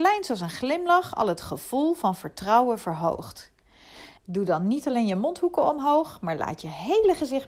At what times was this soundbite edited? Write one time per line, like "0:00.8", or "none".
0:04.2